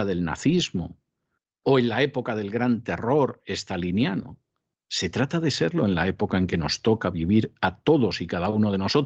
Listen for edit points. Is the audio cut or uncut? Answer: uncut